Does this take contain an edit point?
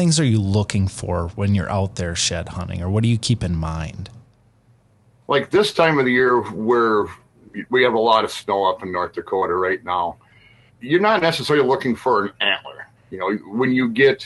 yes; 2 cuts; at 10.7 s, 12.9 s

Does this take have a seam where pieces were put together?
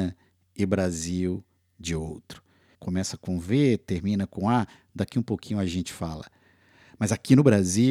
yes; 1 cut; at 2.7 s

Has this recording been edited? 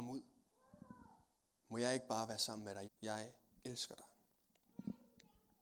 yes; 1 cut; at 2.8 s

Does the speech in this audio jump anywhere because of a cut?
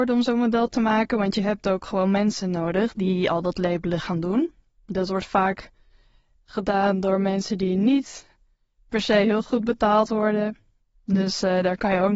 no; 0 cuts

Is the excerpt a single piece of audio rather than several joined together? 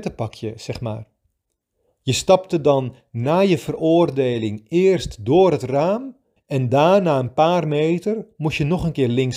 no; 2 cuts; at 1.9 s, 6.4 s

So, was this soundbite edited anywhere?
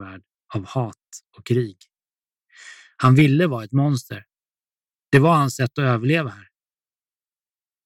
no; 0 cuts

